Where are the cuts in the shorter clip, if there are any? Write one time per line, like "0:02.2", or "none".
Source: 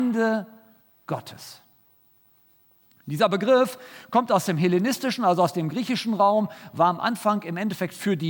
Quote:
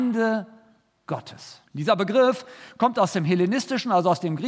0:01.7